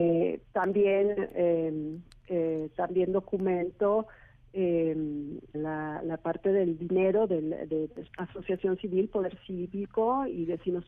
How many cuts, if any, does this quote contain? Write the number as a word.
two